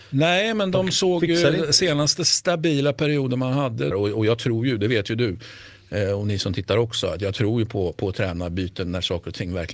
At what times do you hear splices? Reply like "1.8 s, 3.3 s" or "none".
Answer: 3.9 s